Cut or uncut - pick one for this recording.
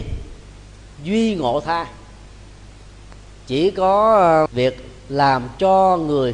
cut